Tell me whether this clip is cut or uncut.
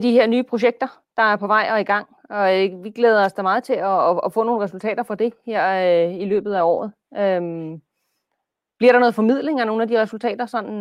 uncut